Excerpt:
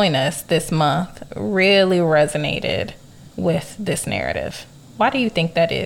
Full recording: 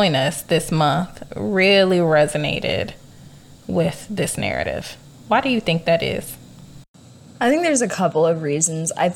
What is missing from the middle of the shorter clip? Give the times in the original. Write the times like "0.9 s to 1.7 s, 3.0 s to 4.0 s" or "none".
3.3 s to 3.6 s